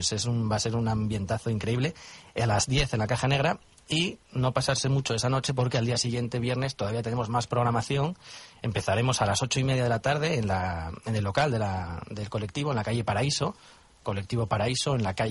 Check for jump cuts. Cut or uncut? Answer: uncut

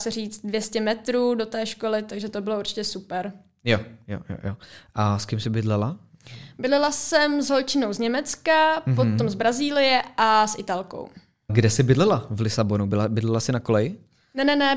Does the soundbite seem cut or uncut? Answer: cut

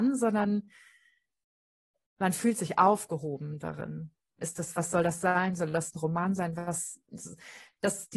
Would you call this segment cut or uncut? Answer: cut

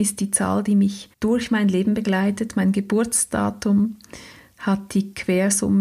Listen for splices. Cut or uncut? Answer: cut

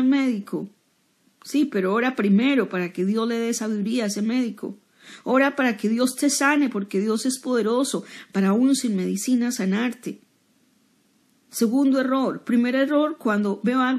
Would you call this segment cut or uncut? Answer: uncut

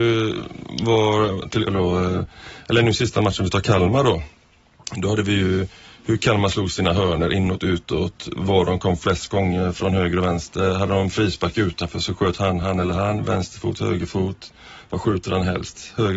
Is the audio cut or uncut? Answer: cut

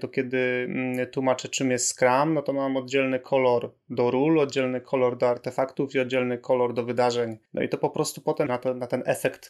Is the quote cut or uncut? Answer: cut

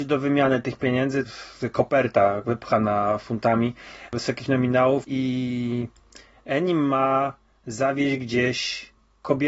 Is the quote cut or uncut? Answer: cut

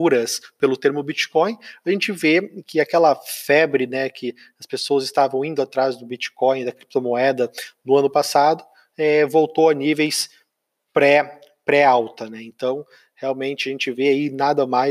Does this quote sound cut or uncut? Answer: uncut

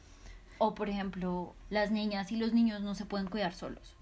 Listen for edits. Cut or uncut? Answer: cut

